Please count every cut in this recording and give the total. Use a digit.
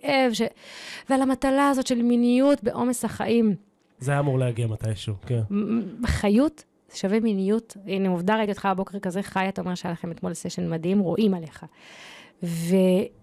1